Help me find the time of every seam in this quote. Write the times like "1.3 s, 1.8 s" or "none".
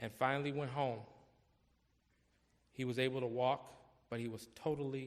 none